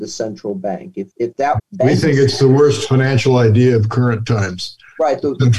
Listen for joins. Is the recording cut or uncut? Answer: cut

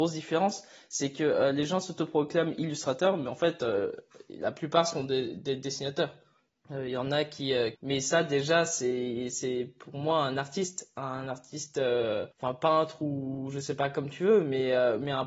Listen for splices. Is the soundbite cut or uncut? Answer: cut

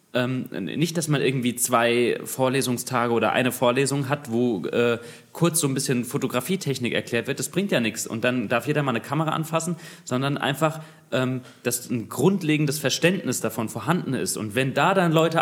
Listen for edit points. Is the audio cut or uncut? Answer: uncut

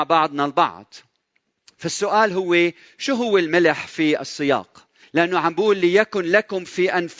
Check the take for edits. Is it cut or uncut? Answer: cut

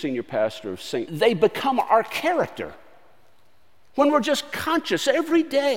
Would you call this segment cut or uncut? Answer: cut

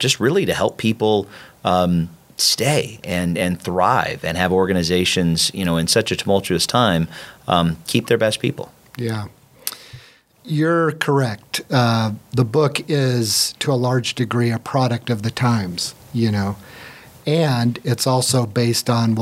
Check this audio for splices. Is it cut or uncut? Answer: uncut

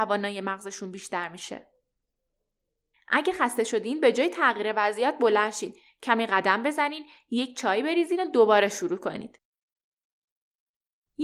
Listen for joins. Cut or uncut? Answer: cut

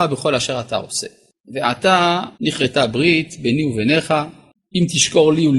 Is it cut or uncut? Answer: cut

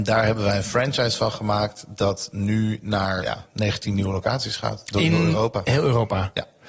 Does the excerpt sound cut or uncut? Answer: cut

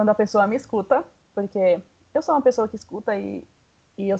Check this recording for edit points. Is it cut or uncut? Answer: uncut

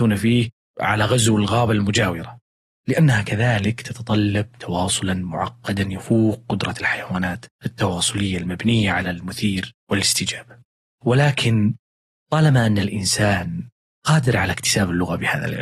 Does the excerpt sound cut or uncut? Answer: cut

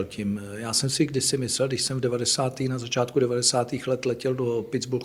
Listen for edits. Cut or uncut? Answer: uncut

